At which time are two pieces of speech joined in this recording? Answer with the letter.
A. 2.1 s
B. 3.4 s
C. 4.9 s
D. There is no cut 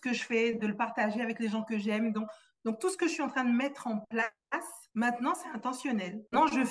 C